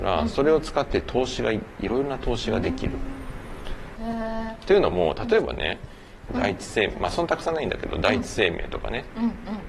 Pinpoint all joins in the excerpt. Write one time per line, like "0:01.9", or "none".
0:04.0
0:06.3